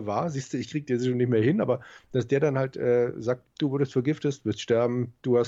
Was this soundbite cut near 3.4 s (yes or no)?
yes